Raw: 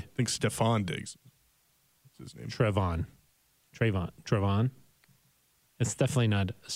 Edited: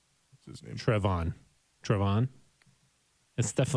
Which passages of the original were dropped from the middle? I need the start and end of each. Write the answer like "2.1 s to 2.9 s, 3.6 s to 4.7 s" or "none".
3.5 s to 4.2 s